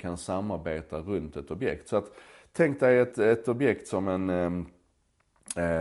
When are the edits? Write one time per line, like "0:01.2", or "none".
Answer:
0:03.1